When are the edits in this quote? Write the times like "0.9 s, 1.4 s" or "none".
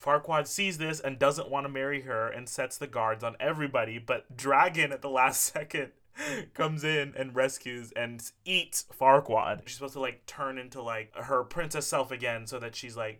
9.7 s